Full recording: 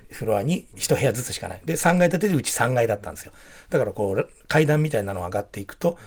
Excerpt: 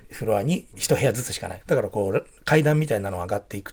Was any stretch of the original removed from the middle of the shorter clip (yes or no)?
yes